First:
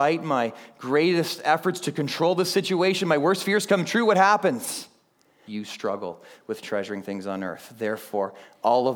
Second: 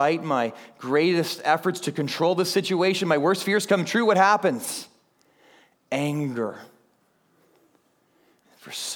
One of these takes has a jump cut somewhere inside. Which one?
first; 1 cut; at 5.5 s

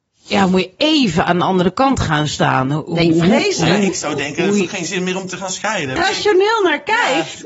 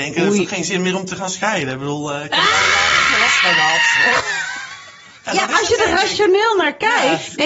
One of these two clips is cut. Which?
first; 1 cut; at 6.0 s

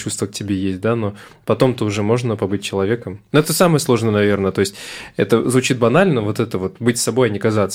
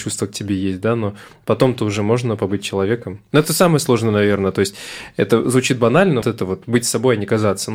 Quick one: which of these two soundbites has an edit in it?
second; 1 cut; at 6.2 s

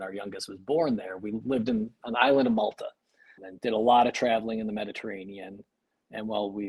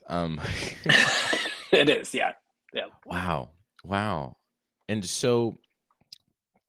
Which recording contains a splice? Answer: first; 1 cut; at 3.4 s

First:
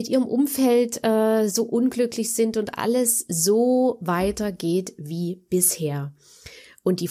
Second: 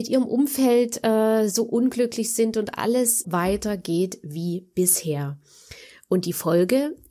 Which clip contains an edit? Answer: second; 1 cut; at 3.2 s

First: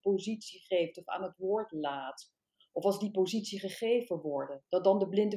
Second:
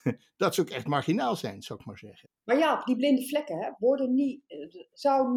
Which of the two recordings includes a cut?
second; 1 cut; at 2.3 s

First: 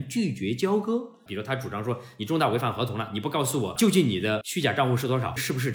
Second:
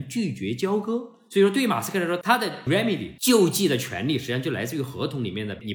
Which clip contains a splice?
first; 1 cut; at 1.3 s

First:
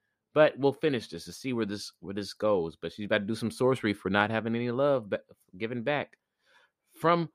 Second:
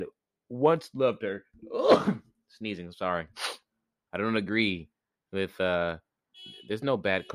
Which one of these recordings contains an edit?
second; 1 cut; at 4.1 s

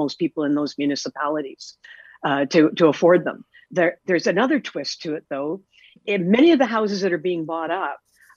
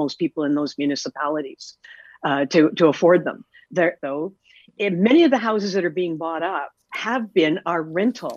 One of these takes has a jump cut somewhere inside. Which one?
second; 2 cuts; at 4.0 s, 6.8 s

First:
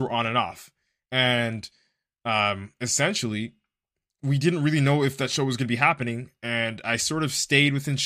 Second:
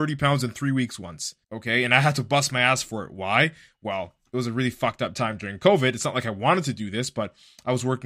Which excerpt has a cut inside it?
second; 1 cut; at 1.4 s

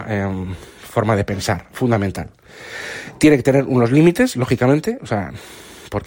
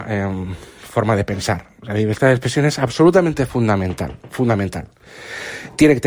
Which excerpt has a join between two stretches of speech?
first; 1 cut; at 1.7 s

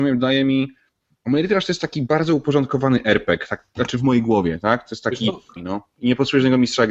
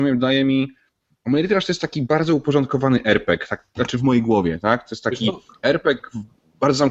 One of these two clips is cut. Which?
first; 1 cut; at 5.6 s

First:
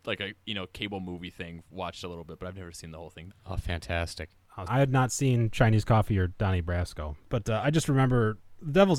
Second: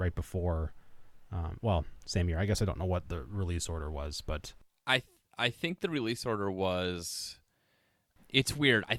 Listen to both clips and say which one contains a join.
first; 2 cuts; at 3.3 s, 4.7 s

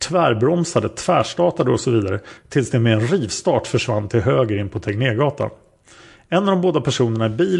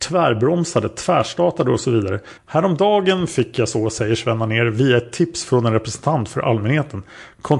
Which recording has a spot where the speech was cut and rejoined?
second; 1 cut; at 2.4 s

